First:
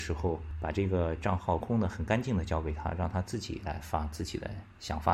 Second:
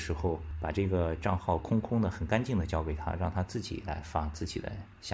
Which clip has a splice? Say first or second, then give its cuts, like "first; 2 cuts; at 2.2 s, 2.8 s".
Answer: first; 1 cut; at 1.6 s